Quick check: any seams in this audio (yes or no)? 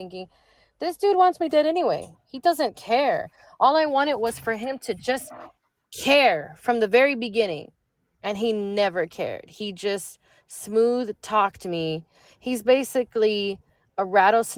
no